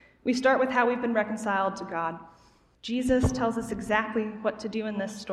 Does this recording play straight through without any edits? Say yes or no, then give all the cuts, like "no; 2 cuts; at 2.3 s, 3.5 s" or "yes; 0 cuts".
no; 1 cut; at 2.7 s